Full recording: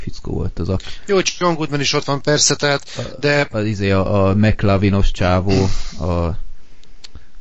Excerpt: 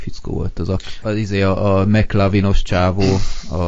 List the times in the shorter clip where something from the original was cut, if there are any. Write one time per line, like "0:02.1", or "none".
0:01.0